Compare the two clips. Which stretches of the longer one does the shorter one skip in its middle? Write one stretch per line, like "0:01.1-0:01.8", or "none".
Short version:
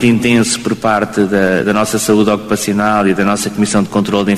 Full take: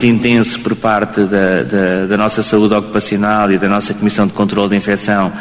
0:01.6-0:02.1